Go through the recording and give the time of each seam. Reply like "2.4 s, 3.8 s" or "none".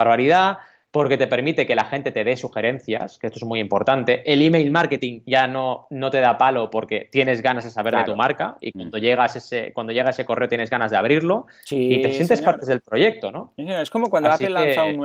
none